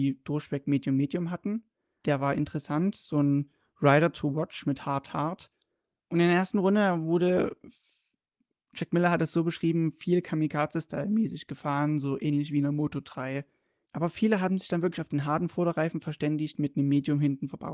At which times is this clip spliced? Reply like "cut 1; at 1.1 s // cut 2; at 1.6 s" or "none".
cut 1; at 2.0 s // cut 2; at 6.0 s // cut 3; at 13.9 s